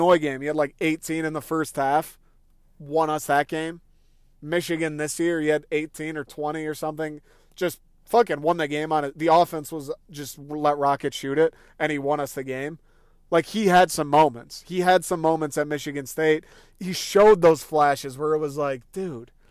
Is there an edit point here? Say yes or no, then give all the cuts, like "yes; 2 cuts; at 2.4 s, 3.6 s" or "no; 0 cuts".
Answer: no; 0 cuts